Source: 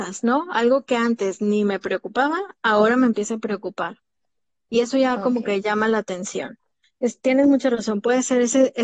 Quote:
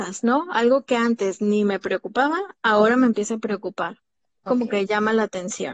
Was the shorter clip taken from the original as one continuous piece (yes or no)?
no